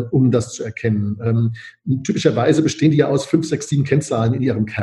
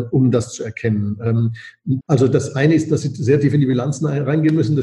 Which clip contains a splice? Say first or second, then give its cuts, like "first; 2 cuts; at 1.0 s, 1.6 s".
second; 1 cut; at 2.0 s